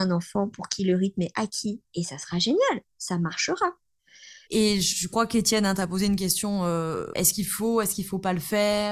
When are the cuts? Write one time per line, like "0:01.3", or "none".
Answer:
0:04.5
0:07.1